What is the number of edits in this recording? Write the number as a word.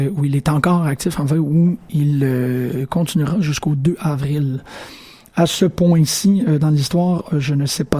zero